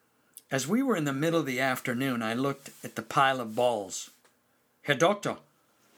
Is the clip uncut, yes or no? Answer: yes